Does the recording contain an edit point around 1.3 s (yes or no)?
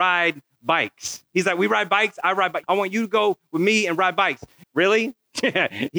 no